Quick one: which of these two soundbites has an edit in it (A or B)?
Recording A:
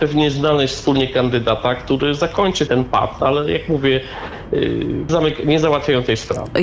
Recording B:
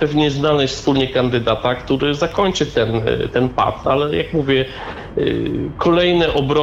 A